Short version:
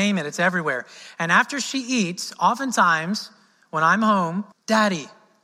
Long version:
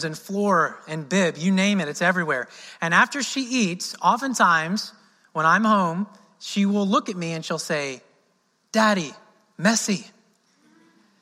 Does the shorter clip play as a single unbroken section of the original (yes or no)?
no